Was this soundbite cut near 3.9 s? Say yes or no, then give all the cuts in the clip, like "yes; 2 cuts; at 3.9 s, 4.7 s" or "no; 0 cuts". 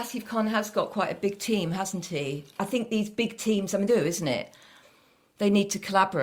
yes; 2 cuts; at 2.6 s, 3.9 s